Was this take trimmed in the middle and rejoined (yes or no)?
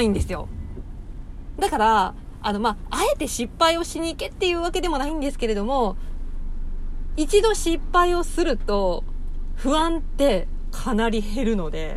yes